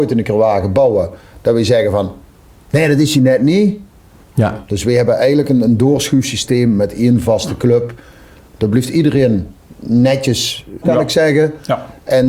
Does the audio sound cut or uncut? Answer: cut